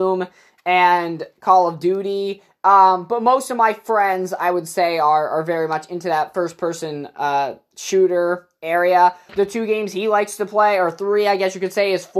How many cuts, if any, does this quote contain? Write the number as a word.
one